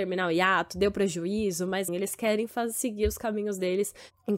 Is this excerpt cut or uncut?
cut